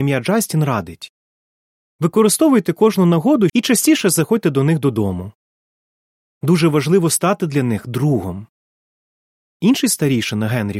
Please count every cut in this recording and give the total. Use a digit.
1